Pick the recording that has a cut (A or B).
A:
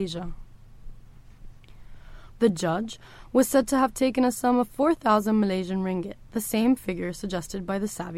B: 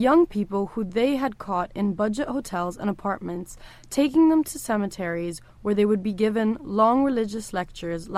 A